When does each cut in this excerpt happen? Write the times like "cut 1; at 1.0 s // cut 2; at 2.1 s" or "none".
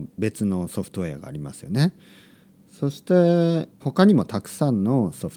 cut 1; at 3.8 s